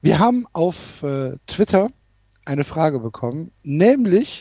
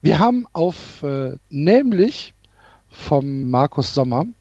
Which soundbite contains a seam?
second; 2 cuts; at 1.4 s, 3.4 s

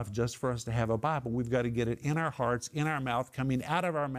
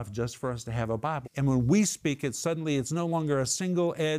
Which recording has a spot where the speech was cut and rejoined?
second; 1 cut; at 1.2 s

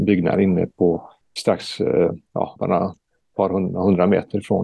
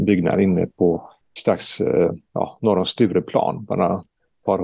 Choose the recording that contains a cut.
first; 1 cut; at 2.6 s

